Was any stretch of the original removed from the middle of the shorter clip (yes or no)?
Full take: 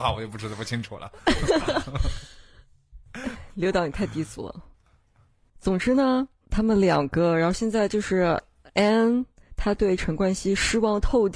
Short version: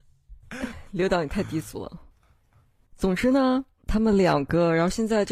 no